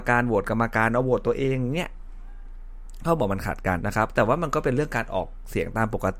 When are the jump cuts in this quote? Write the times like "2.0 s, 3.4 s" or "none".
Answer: 3.8 s